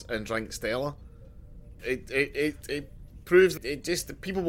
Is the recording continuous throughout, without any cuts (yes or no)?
no